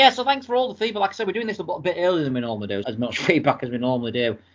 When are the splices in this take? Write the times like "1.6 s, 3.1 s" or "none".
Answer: 2.8 s